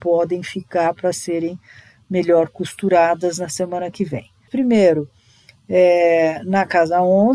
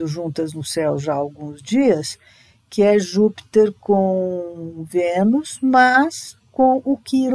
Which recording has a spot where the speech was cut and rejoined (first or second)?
first